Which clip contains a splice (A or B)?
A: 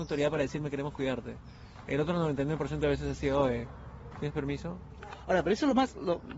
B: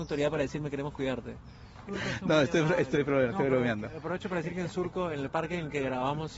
B